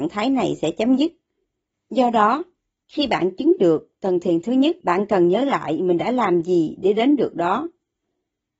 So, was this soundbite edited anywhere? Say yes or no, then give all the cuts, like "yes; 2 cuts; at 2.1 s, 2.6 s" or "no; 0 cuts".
yes; 2 cuts; at 1.7 s, 4.8 s